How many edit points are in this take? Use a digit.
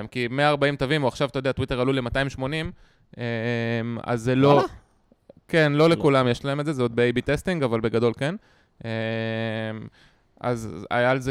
0